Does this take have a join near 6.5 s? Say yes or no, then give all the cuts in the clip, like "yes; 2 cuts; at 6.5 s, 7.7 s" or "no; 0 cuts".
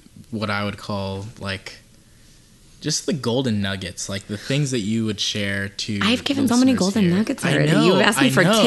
yes; 1 cut; at 6.5 s